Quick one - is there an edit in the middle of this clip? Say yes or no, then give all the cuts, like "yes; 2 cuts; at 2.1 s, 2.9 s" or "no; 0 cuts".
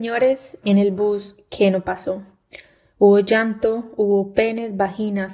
no; 0 cuts